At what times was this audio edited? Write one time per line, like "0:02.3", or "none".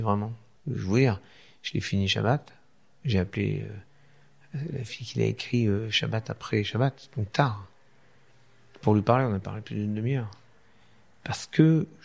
none